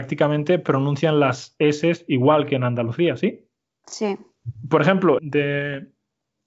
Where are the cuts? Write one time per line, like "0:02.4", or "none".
0:03.8
0:05.2